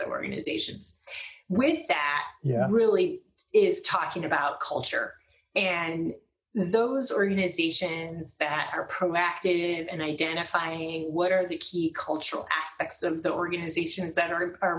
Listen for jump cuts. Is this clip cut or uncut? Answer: uncut